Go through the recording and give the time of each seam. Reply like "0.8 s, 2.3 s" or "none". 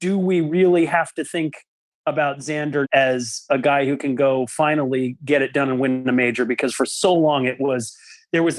2.8 s

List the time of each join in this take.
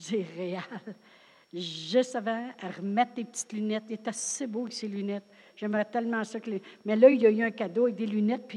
none

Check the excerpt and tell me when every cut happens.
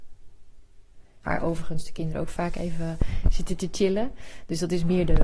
1.2 s

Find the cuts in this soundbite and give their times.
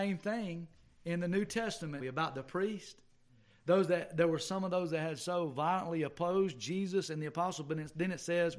2.0 s

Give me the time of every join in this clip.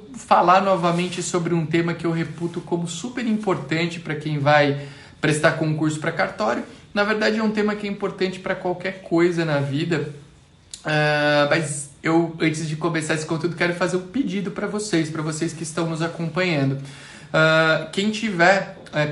none

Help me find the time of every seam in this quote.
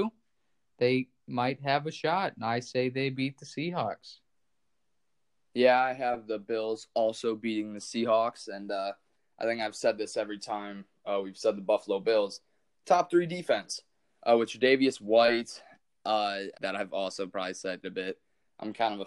16.5 s, 17.8 s

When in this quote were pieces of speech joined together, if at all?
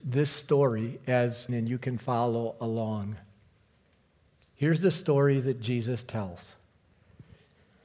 1.5 s

